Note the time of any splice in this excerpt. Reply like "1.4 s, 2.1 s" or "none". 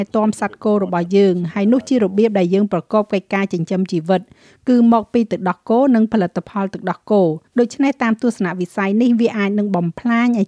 7.5 s